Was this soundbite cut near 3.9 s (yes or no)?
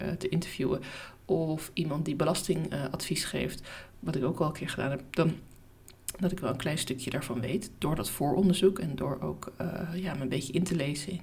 yes